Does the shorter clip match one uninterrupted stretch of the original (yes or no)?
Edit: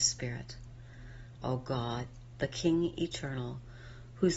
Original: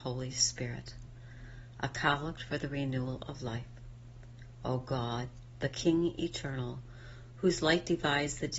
no